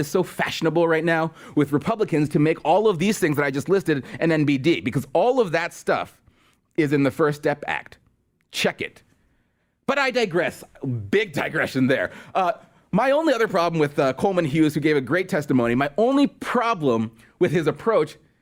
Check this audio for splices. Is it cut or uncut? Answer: uncut